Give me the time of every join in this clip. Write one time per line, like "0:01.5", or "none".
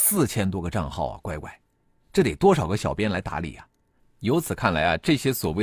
0:04.0